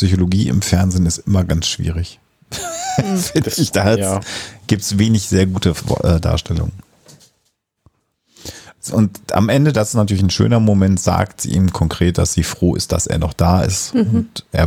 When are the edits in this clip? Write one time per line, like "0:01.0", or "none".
none